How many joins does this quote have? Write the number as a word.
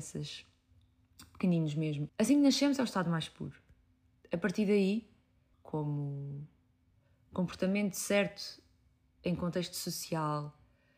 two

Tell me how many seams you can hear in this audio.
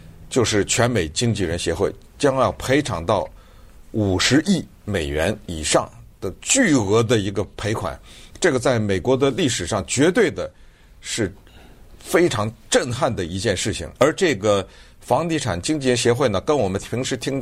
one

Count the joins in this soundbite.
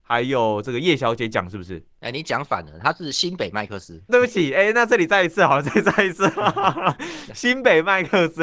one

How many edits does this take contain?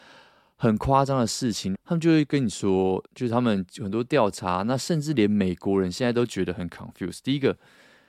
two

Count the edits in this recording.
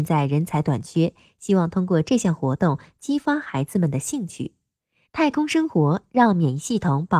one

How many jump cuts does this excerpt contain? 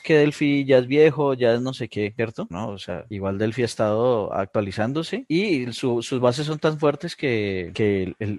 one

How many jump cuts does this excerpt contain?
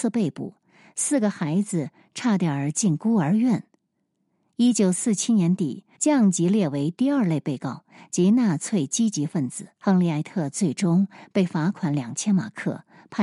two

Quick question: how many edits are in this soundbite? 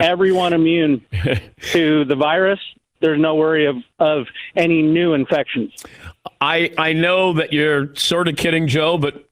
one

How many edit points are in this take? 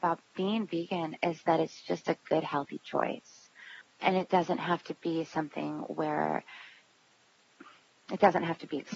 zero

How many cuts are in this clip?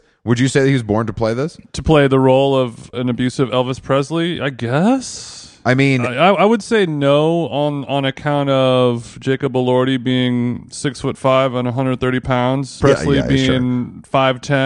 two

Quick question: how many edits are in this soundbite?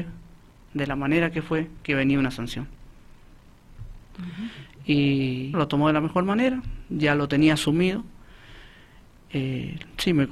two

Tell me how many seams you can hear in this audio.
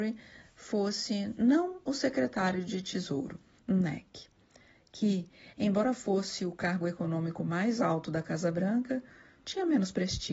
one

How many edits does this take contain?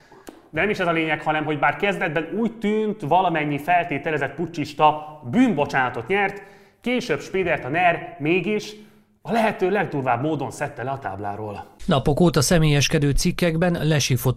zero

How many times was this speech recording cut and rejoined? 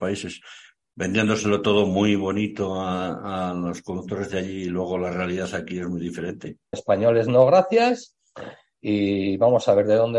one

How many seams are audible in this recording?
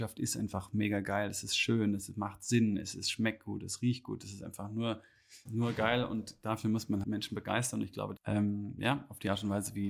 three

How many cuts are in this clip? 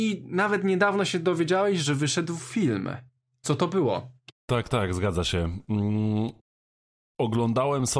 zero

